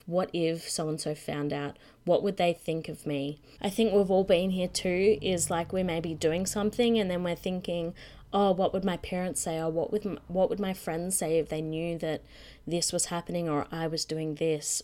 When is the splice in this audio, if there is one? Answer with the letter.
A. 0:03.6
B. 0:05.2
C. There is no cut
A